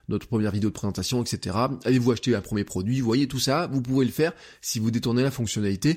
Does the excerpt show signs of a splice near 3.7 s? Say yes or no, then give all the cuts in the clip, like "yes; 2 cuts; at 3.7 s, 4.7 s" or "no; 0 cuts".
no; 0 cuts